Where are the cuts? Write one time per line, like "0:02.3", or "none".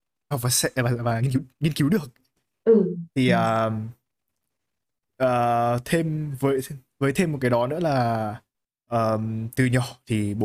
none

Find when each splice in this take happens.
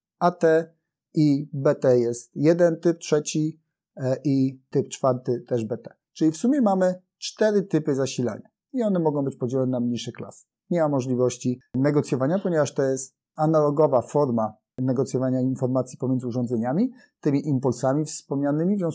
0:10.5

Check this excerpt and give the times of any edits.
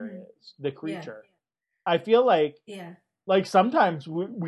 none

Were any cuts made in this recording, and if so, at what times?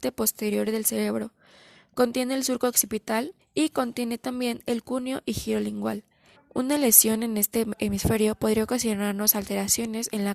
0:03.4
0:06.4

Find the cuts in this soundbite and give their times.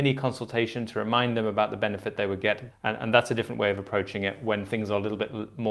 0:02.7

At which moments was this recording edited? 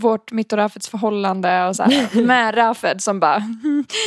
none

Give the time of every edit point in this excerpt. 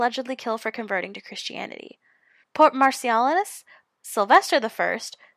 0:02.4
0:03.9

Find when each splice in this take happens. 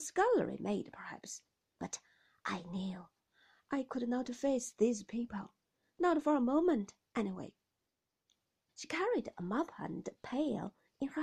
0:01.7
0:08.7

